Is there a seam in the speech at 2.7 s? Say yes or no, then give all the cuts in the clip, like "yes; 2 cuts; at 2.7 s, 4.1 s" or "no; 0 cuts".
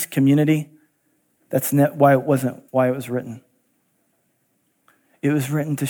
yes; 2 cuts; at 1.4 s, 2.7 s